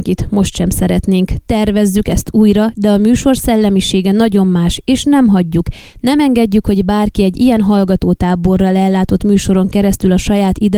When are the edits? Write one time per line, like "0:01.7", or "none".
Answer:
none